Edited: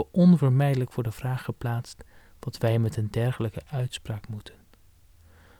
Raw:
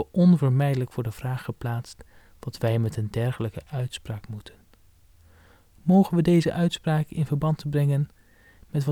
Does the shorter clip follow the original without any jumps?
yes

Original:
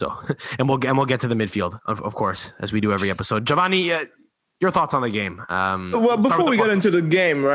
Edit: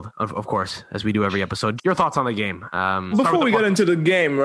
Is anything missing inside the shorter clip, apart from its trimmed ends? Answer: yes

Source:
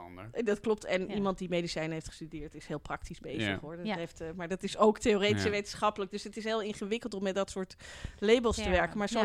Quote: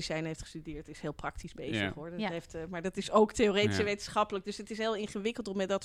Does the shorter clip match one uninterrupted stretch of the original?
yes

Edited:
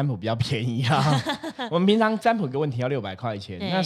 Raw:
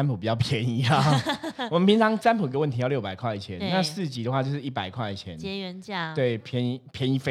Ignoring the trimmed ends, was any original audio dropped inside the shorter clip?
no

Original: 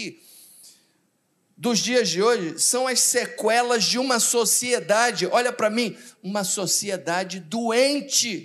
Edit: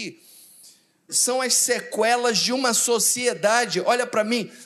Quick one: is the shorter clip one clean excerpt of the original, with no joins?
no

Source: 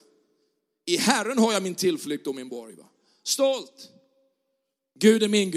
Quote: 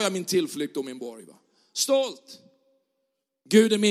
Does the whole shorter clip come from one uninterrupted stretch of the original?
yes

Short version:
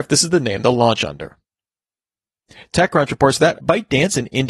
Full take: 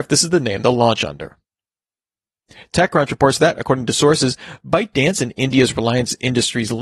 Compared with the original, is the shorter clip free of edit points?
no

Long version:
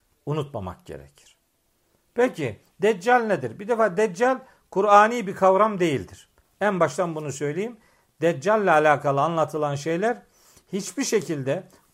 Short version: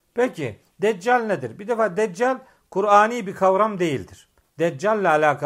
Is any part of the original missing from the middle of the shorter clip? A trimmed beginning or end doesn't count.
yes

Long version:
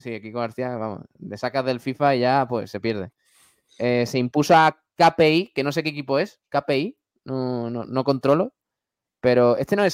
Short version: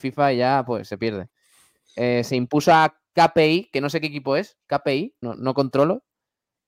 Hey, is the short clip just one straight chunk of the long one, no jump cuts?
no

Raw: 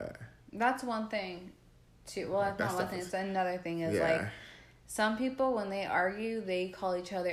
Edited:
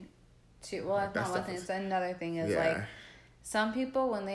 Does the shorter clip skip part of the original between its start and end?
no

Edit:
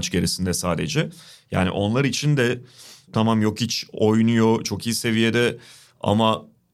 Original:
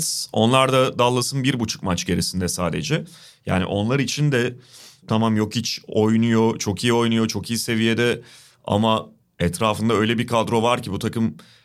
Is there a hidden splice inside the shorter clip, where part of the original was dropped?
yes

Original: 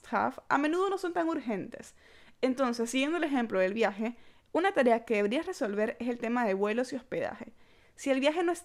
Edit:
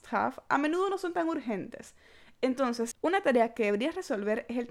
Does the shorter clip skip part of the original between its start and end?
yes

